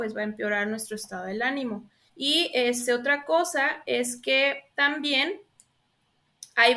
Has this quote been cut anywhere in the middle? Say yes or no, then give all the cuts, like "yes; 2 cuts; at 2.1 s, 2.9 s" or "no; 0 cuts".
yes; 1 cut; at 2.1 s